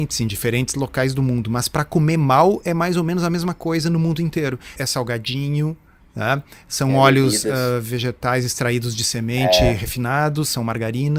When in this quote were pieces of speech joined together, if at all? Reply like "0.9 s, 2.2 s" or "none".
4.8 s